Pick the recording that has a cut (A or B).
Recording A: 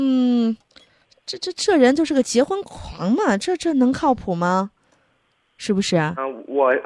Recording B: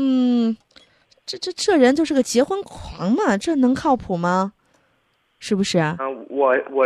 B